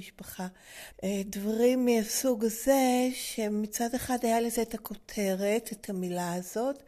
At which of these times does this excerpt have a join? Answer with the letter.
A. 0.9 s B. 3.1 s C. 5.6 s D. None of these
A